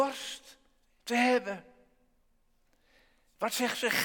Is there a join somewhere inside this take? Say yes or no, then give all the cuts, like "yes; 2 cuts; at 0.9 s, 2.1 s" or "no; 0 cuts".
no; 0 cuts